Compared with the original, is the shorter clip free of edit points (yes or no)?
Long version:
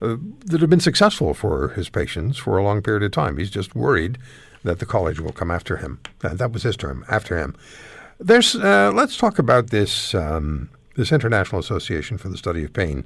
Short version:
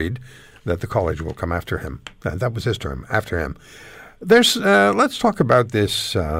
yes